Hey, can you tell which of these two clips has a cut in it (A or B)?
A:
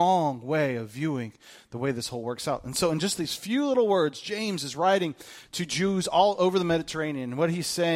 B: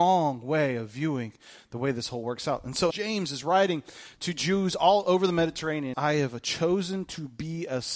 B